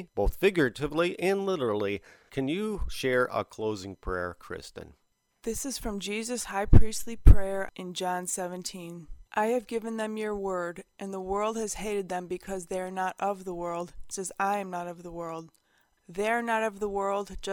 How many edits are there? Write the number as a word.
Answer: three